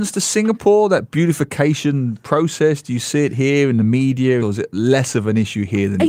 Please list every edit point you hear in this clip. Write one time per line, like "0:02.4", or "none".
0:04.4